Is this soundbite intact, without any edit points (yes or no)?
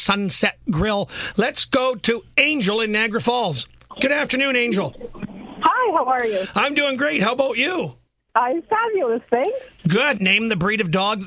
no